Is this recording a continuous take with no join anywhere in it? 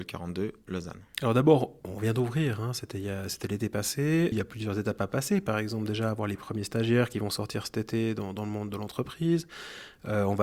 no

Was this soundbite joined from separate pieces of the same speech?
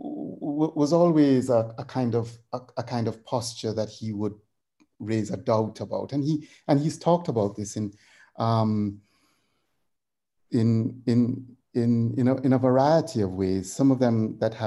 no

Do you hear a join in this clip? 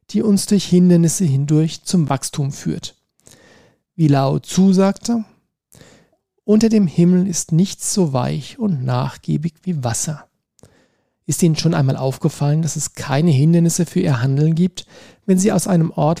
yes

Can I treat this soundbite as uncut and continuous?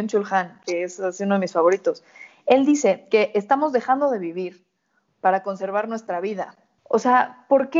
no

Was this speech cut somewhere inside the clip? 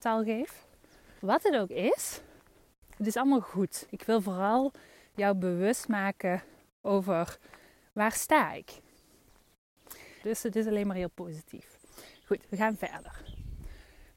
yes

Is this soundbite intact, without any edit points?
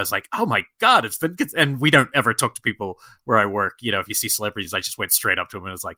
yes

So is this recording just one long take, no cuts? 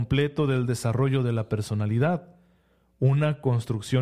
yes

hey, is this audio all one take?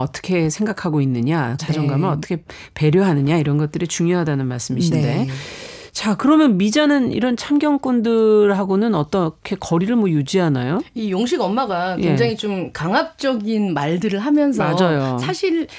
no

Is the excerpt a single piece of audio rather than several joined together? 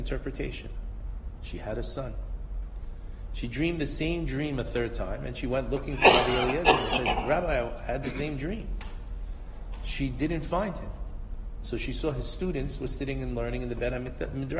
no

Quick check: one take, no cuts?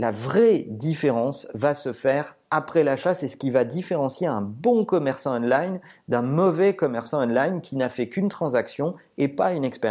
yes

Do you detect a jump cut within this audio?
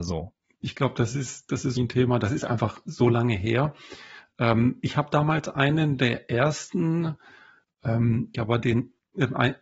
yes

